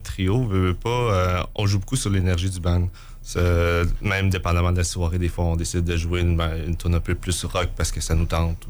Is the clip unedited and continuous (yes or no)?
no